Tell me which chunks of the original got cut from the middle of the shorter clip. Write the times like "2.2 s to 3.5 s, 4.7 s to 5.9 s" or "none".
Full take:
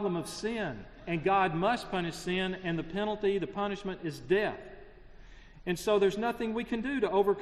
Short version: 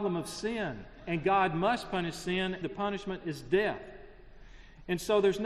2.6 s to 3.4 s